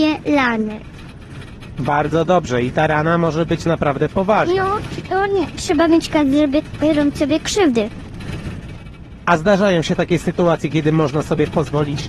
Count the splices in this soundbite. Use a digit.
0